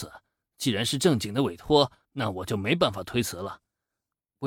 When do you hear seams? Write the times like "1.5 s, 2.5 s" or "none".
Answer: 2.0 s